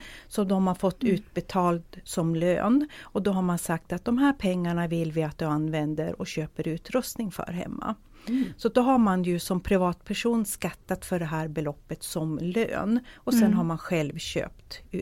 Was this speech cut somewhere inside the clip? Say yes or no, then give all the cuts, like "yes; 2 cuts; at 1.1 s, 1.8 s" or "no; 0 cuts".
no; 0 cuts